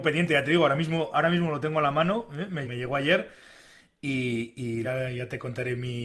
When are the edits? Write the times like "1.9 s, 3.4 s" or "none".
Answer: 2.6 s, 4.8 s